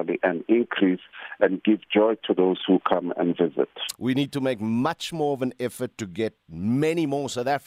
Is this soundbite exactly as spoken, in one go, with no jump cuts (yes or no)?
no